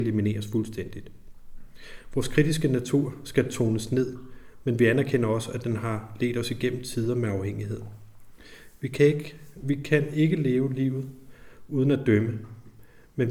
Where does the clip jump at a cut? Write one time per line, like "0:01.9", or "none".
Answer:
none